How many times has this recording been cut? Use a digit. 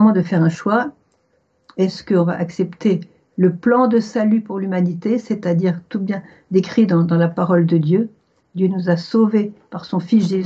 0